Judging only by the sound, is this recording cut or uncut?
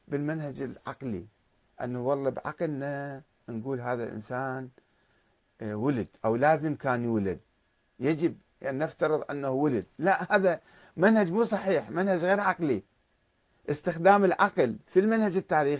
uncut